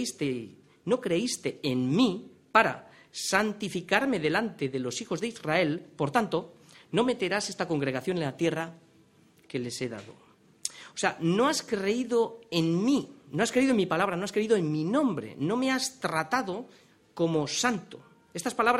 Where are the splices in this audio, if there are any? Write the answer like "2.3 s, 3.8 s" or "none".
none